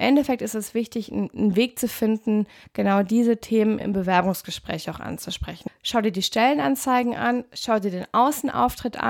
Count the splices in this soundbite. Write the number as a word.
two